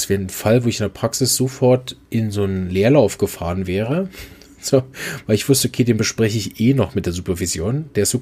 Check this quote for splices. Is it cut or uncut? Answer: uncut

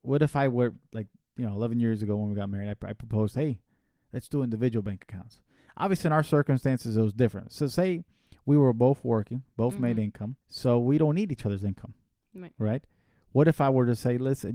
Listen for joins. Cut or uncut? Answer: cut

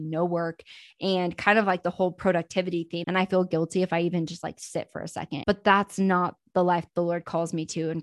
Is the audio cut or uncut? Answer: cut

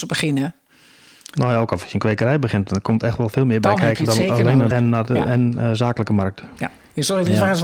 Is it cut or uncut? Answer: cut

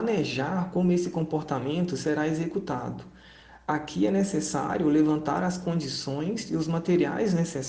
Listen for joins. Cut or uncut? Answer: uncut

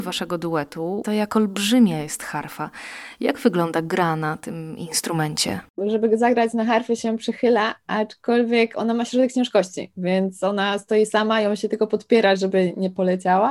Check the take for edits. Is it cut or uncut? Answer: cut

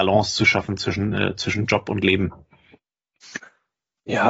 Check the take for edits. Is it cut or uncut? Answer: uncut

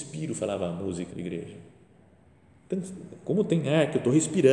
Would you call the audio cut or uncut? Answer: cut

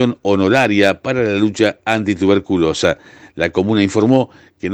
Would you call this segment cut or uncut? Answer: uncut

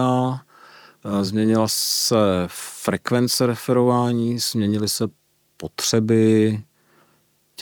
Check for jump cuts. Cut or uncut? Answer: uncut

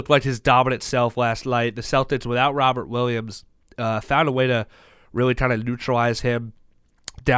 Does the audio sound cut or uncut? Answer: uncut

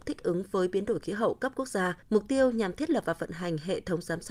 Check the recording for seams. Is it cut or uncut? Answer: cut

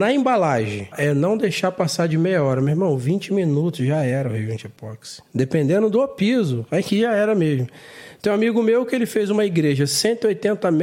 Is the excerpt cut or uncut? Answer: cut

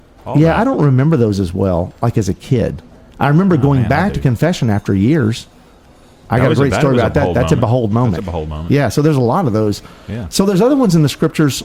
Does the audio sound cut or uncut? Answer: uncut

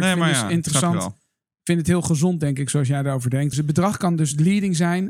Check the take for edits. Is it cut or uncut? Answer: cut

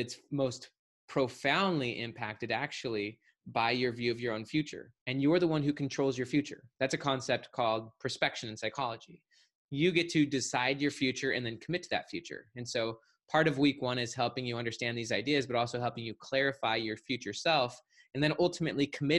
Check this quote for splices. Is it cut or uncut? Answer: cut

